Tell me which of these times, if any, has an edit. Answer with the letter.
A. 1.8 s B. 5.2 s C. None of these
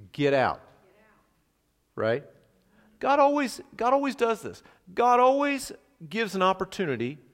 C